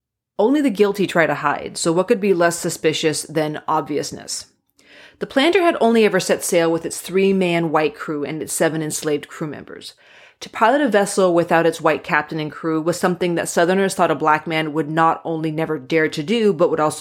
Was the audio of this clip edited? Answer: no; 0 cuts

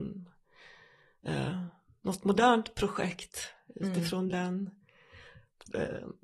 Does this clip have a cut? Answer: no; 0 cuts

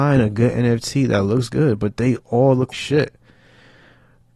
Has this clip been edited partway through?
yes; 1 cut; at 2.7 s

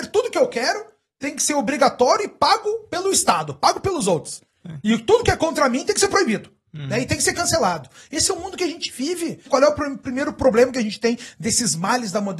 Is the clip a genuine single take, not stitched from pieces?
no; 1 cut; at 9.5 s

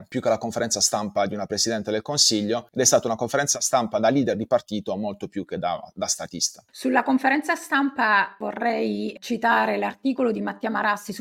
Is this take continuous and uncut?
no; 1 cut; at 6.7 s

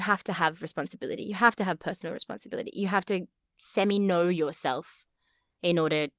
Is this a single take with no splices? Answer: yes; 0 cuts

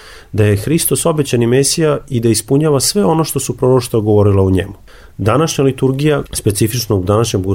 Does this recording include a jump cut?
yes; 1 cut; at 6.2 s

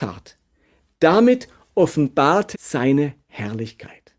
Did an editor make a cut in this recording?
yes; 1 cut; at 2.5 s

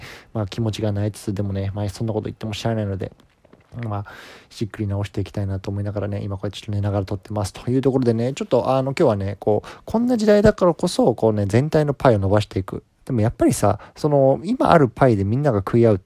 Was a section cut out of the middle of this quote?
yes; 1 cut; at 13.0 s

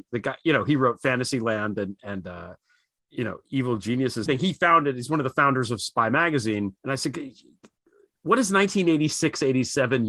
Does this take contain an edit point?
yes; 2 cuts; at 4.3 s, 6.8 s

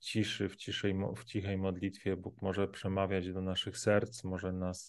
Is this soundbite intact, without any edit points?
yes; 0 cuts

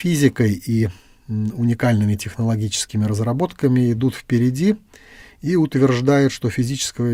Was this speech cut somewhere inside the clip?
no; 0 cuts

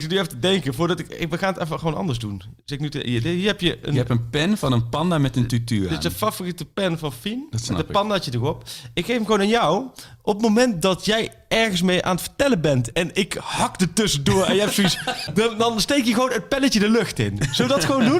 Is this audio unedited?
no; 2 cuts; at 12.9 s, 15.3 s

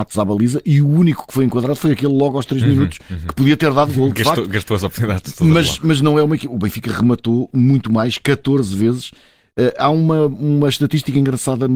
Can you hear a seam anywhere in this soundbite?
no; 0 cuts

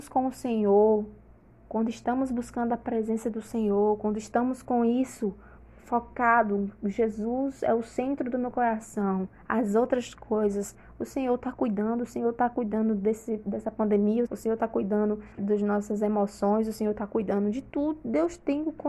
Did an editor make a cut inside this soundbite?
yes; 2 cuts; at 14.3 s, 15.4 s

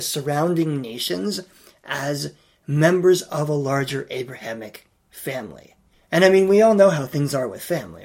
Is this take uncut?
yes; 0 cuts

